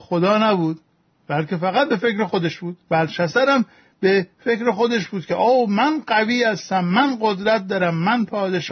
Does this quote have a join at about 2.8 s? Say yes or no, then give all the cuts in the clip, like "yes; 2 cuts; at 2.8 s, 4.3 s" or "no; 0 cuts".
yes; 1 cut; at 2.8 s